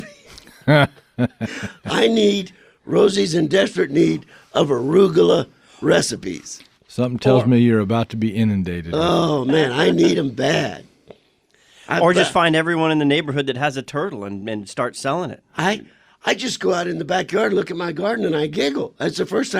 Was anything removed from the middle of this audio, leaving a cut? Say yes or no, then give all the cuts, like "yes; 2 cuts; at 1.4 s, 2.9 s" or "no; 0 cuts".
no; 0 cuts